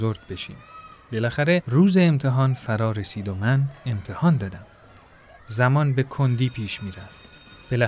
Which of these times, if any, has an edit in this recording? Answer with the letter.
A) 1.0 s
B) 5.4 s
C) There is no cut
B